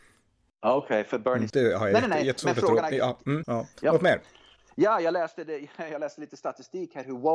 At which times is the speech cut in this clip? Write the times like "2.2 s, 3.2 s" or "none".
1.5 s, 3.4 s